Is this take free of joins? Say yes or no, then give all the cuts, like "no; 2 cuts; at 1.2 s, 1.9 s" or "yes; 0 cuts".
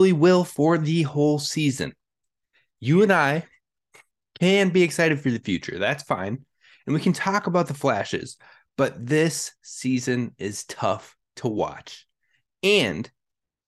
yes; 0 cuts